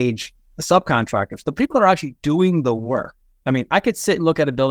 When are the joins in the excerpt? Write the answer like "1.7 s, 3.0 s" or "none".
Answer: 1.4 s